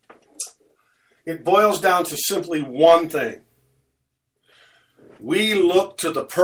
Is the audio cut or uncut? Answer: uncut